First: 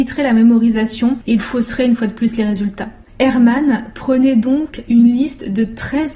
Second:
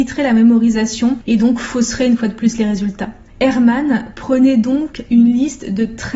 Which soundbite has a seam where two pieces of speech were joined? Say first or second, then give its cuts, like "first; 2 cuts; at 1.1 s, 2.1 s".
first; 1 cut; at 1.4 s